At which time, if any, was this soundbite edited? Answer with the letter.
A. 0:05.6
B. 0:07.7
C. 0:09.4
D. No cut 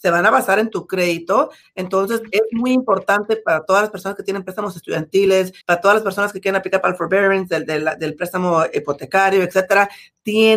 A